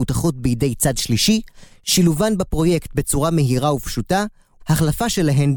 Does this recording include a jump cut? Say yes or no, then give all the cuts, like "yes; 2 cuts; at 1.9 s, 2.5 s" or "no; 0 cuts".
yes; 1 cut; at 4.6 s